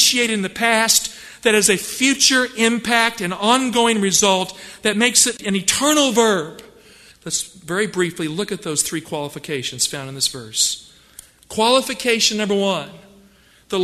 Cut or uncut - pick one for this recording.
cut